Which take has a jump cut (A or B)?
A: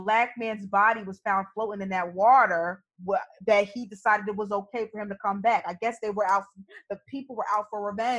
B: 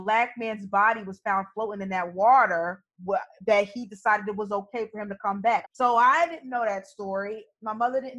B